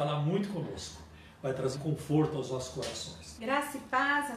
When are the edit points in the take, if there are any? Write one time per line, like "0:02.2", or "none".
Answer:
0:01.7
0:03.4